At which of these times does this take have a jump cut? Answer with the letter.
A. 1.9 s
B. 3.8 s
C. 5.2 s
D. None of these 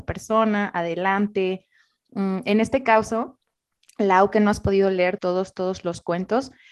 C